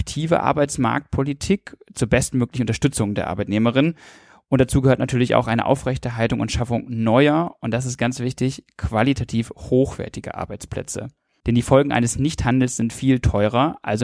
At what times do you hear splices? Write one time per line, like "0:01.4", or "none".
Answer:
0:11.4
0:12.9